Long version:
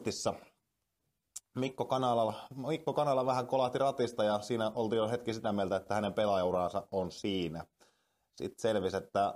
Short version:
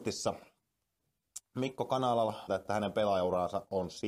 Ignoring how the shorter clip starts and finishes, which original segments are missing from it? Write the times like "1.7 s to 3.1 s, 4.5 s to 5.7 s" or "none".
2.5 s to 5.7 s